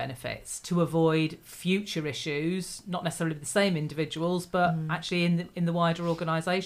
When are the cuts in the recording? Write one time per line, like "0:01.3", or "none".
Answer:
none